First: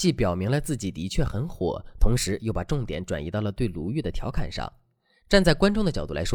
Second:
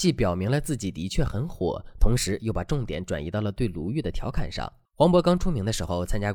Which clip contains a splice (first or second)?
second